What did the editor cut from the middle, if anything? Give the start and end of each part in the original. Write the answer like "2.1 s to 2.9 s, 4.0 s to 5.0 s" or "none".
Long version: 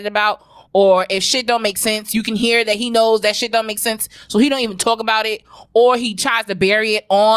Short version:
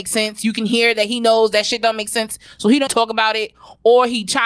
4.6 s to 4.8 s